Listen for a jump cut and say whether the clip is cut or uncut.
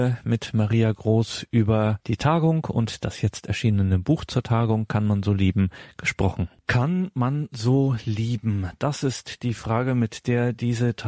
cut